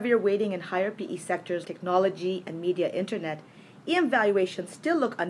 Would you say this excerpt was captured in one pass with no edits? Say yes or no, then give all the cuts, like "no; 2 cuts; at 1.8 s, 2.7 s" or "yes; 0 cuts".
no; 1 cut; at 1.6 s